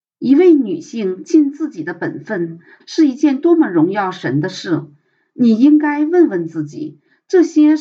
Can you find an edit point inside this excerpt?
yes; 1 cut; at 2.8 s

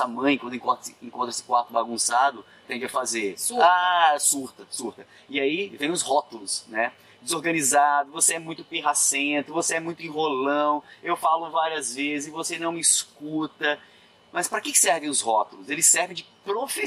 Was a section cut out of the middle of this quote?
yes; 1 cut; at 2.6 s

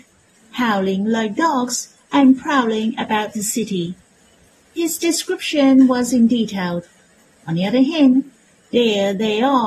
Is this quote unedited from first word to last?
yes; 0 cuts

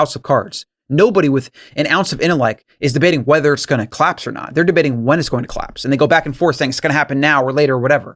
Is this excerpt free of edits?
yes; 0 cuts

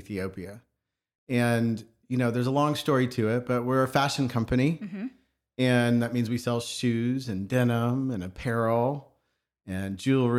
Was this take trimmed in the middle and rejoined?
no; 0 cuts

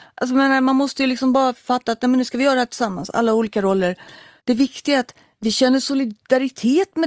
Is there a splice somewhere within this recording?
yes; 1 cut; at 4.4 s

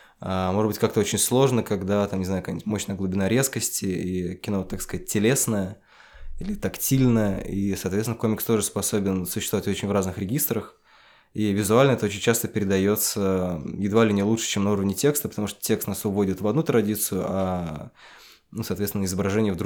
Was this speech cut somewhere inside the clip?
no; 0 cuts

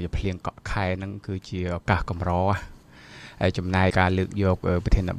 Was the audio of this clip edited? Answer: yes; 1 cut; at 3.9 s

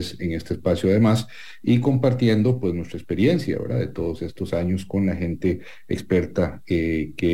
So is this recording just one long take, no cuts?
yes; 0 cuts

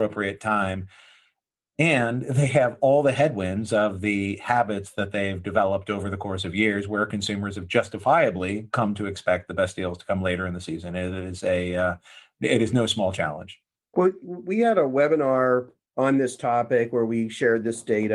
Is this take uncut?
yes; 0 cuts

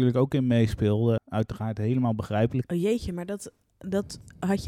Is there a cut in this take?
yes; 2 cuts; at 1.2 s, 2.6 s

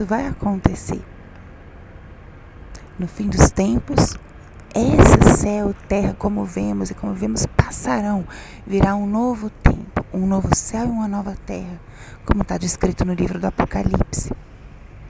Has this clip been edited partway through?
no; 0 cuts

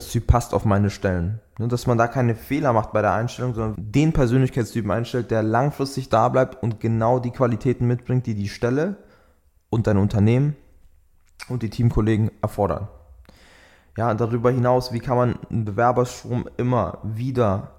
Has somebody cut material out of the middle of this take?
yes; 1 cut; at 3.7 s

